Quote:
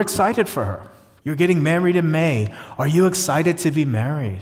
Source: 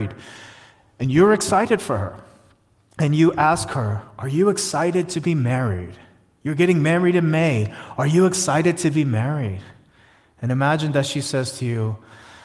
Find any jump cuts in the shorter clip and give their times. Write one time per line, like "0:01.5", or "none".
0:01.2

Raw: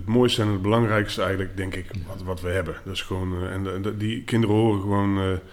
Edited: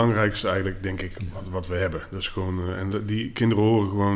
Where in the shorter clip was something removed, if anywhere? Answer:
0:02.9

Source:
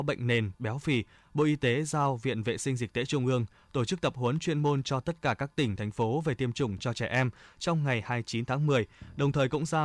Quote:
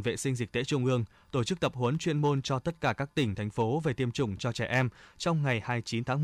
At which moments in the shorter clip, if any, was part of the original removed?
none

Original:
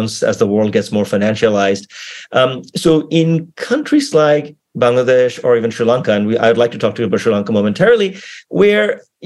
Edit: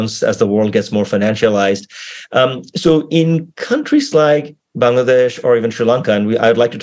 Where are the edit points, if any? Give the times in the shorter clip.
none

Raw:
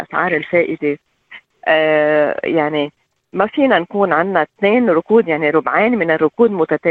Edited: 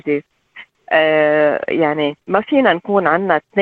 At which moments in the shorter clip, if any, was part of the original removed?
0:02.2

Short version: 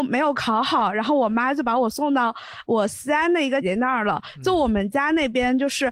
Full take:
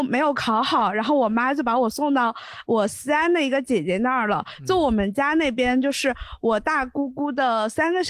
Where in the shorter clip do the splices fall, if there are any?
0:03.6

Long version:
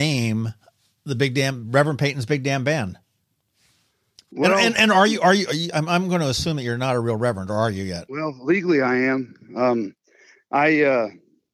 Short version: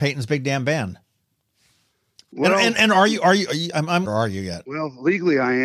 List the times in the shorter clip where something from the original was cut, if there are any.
0:04.0

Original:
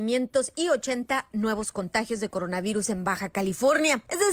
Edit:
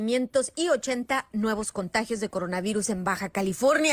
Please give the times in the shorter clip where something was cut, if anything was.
none

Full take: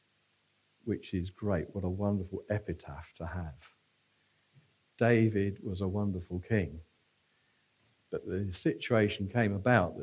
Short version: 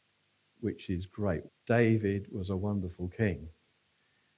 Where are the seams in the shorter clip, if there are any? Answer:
0:01.5

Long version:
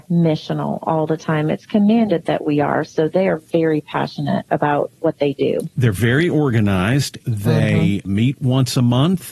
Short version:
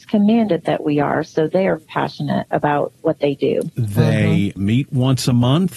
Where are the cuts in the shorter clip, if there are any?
0:01.8
0:03.7

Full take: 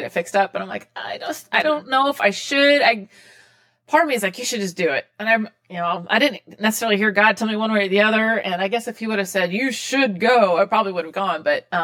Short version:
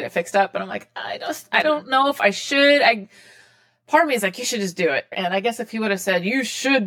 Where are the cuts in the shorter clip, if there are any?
0:05.1

